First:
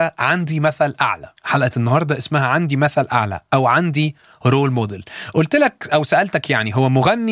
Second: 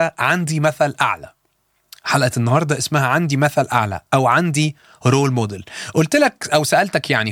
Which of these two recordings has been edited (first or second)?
first